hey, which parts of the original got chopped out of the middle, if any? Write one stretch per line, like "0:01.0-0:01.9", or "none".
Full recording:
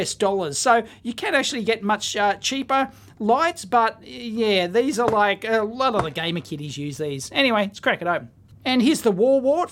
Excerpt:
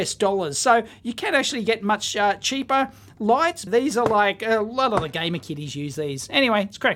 0:03.7-0:04.7